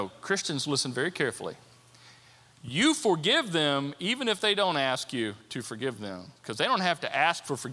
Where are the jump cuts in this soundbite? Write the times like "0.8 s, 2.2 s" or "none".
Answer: none

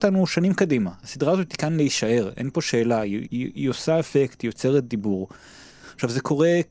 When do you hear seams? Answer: 3.2 s

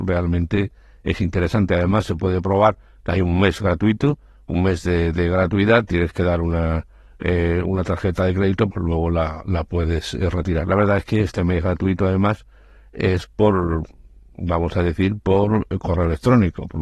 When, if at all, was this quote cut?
8.7 s

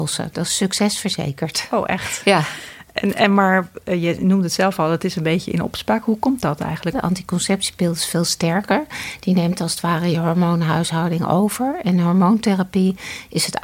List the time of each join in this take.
6.9 s

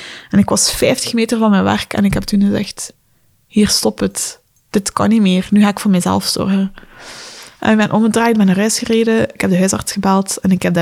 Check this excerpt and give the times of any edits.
none

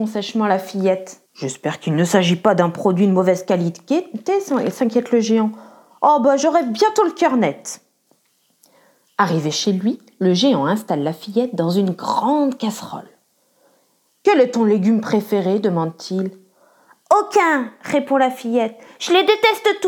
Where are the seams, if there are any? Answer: 1.3 s

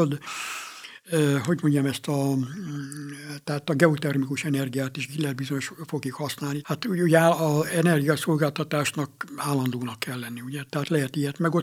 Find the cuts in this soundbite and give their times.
6.6 s, 10.7 s

